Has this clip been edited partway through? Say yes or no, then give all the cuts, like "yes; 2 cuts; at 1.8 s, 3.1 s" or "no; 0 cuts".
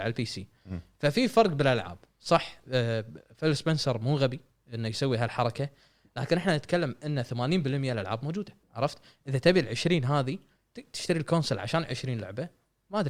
yes; 1 cut; at 8.6 s